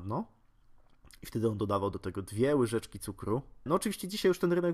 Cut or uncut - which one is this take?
cut